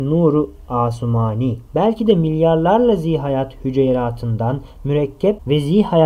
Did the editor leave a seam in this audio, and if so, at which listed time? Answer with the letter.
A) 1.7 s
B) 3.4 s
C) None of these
A